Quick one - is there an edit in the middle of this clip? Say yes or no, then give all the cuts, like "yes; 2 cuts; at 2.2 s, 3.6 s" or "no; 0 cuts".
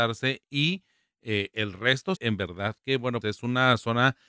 yes; 2 cuts; at 2.2 s, 3.2 s